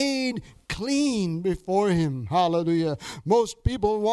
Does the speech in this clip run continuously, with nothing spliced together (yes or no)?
yes